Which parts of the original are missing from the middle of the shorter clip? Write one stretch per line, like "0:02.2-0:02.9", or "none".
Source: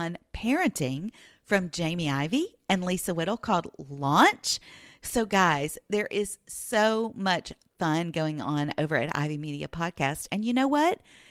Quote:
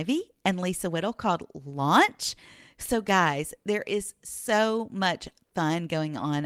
none